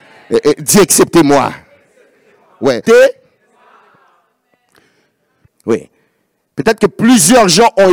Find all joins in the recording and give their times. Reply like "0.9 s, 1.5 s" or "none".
2.9 s, 5.5 s